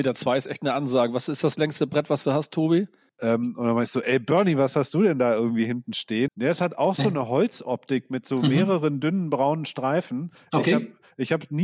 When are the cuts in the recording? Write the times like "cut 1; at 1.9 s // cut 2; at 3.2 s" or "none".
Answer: cut 1; at 3.1 s // cut 2; at 6.3 s

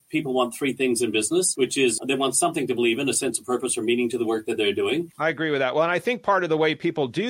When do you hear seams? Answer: cut 1; at 2.0 s // cut 2; at 5.1 s

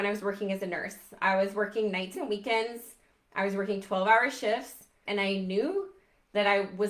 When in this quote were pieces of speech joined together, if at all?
cut 1; at 2.1 s // cut 2; at 5.1 s

